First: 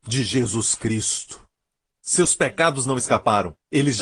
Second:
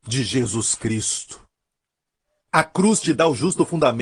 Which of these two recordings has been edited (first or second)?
first